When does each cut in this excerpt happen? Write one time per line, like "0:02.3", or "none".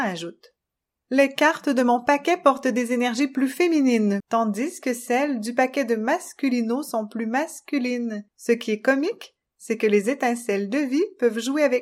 0:04.2
0:08.3

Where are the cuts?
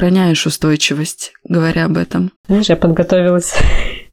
0:02.4

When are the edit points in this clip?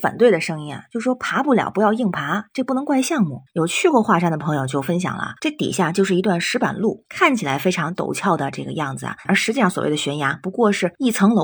0:05.4

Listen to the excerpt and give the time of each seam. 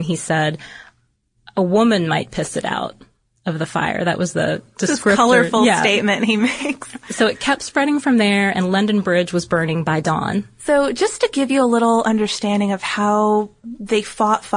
none

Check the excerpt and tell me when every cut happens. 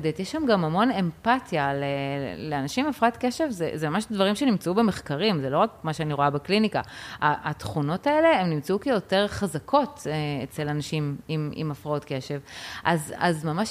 none

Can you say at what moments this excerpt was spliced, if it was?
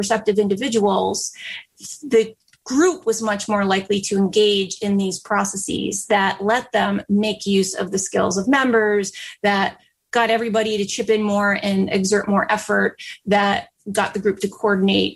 none

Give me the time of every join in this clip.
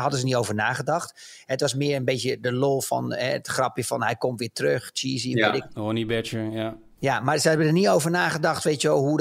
none

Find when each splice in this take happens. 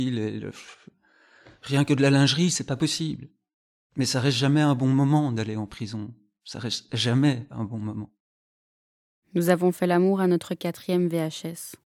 0:03.8

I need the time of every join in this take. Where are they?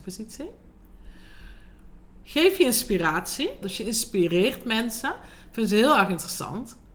0:03.6

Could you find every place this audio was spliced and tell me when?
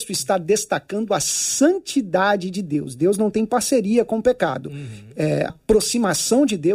0:05.5

